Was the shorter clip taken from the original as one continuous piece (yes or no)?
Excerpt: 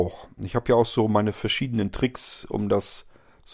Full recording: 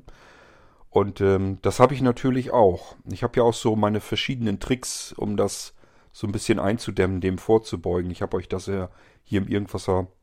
yes